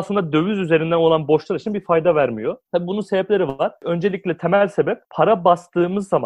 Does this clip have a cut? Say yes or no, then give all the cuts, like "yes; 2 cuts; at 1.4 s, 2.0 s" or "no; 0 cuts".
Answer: yes; 1 cut; at 2.7 s